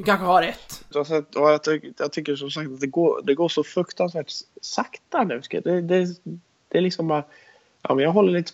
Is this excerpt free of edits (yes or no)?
no